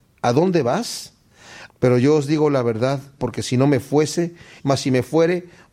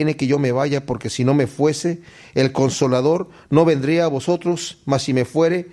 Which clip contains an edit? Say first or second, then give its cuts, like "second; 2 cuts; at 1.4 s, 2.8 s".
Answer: first; 3 cuts; at 1.7 s, 3.2 s, 4.6 s